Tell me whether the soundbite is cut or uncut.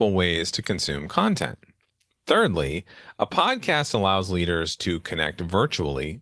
uncut